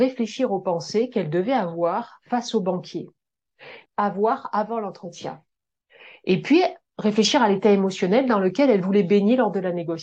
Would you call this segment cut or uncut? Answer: cut